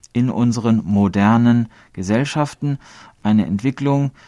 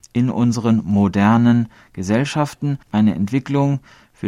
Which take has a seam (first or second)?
second